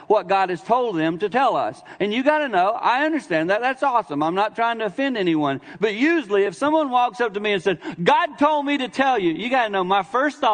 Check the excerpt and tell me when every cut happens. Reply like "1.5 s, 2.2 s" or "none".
none